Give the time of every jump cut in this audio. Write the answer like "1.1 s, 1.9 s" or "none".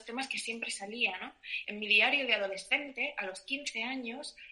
1.6 s